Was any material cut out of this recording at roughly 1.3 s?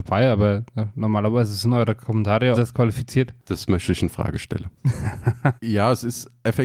no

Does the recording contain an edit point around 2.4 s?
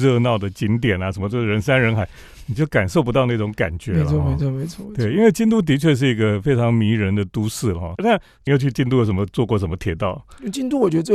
no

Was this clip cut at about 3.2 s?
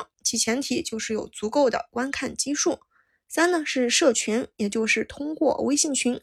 no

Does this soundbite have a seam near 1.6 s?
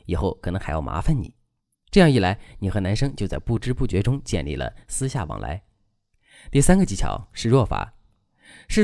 no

